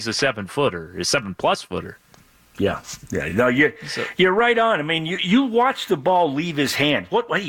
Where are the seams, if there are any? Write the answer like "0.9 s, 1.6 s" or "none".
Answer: none